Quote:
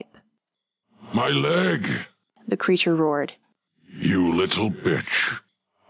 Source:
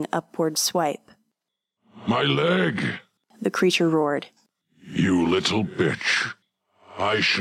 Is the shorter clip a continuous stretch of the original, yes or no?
yes